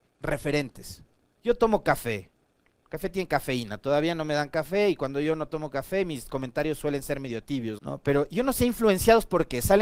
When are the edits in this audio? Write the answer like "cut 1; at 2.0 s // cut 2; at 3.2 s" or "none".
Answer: cut 1; at 1.4 s // cut 2; at 7.8 s